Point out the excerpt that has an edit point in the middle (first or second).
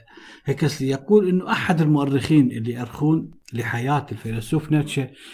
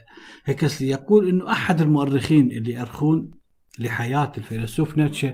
first